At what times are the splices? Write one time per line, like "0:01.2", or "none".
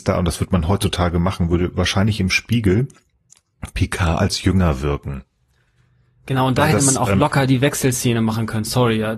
none